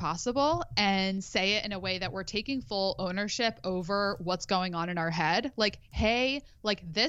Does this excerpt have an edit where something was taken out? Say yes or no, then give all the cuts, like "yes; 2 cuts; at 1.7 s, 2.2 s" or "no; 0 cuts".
no; 0 cuts